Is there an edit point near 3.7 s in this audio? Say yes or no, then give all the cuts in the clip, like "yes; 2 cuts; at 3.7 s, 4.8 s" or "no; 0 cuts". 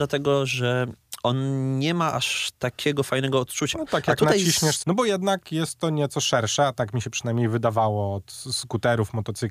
yes; 2 cuts; at 3.7 s, 4.8 s